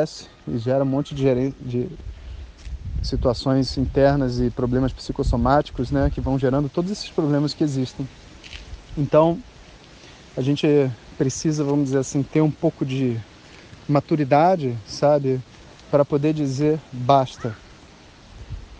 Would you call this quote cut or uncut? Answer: uncut